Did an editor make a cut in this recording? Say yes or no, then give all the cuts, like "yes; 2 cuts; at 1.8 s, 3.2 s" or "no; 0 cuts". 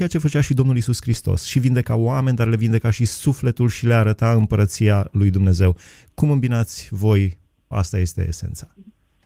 yes; 1 cut; at 7.7 s